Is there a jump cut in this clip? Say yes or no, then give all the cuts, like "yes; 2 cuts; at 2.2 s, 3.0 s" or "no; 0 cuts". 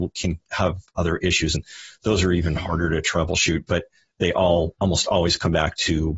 no; 0 cuts